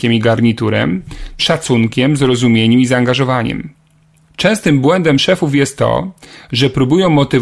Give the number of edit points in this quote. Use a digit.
2